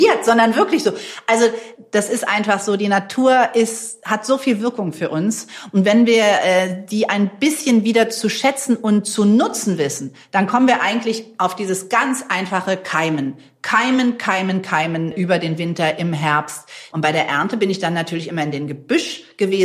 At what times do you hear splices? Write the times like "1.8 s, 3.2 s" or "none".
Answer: 16.9 s